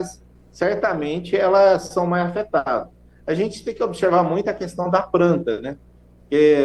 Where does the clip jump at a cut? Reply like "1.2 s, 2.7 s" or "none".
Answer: none